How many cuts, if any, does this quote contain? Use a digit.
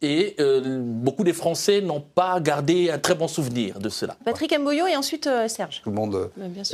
2